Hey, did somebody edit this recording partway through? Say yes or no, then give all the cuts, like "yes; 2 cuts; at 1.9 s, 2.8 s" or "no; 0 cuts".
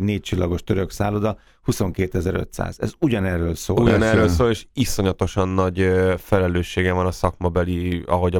no; 0 cuts